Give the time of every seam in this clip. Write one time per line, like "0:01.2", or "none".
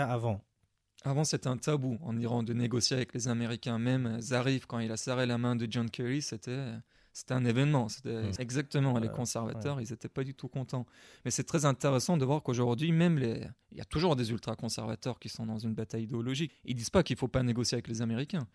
0:08.4
0:13.6
0:16.5